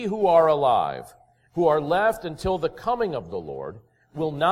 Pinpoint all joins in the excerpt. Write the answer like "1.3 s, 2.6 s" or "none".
none